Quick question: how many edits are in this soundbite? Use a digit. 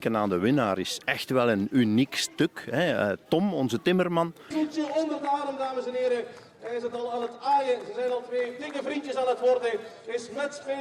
1